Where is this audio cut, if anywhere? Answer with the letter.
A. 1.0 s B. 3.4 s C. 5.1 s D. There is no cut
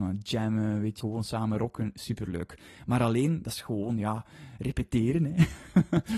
A